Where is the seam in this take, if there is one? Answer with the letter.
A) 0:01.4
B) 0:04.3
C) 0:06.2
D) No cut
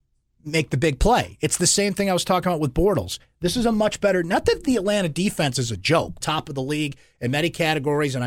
C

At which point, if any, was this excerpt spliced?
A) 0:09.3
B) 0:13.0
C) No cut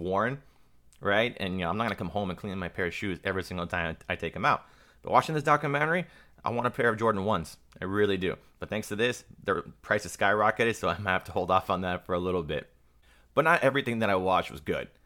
C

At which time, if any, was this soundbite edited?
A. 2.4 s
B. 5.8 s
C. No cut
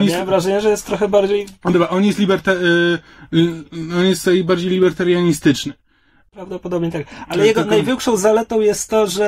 C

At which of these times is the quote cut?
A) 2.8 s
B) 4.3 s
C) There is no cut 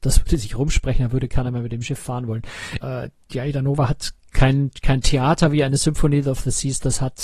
A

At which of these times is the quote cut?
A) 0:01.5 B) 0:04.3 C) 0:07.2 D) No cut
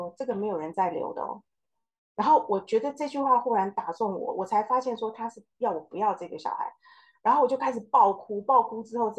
D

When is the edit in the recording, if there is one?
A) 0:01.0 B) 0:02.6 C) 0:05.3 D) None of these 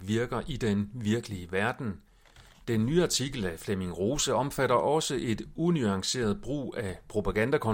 B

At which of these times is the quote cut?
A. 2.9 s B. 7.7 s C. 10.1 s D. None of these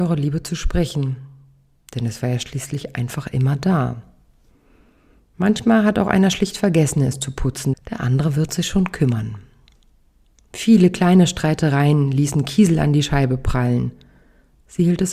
B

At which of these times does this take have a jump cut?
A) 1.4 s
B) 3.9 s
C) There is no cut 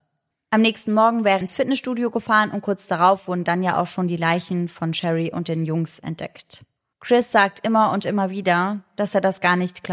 A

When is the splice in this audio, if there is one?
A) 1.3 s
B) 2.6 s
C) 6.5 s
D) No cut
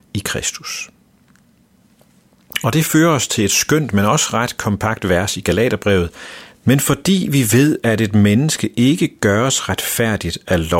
C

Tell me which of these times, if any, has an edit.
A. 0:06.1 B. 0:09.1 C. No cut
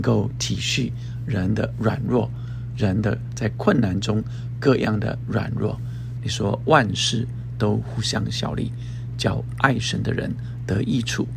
A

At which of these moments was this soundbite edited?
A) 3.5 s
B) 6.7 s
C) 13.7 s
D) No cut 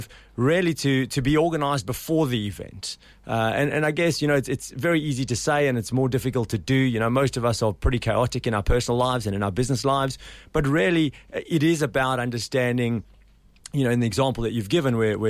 D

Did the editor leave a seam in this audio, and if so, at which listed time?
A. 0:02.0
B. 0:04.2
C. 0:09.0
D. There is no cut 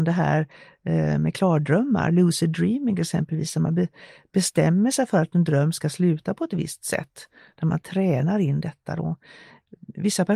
D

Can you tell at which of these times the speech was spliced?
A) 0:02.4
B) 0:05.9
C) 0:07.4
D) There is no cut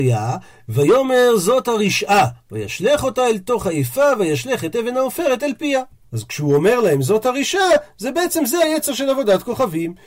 D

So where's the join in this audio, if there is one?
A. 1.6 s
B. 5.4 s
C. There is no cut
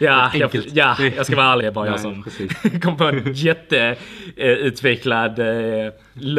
A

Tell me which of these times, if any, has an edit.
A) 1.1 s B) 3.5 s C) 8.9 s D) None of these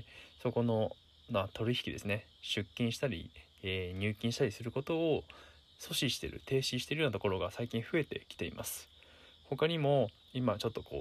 D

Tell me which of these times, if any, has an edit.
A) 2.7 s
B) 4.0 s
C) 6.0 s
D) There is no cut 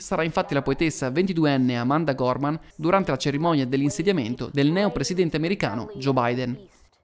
A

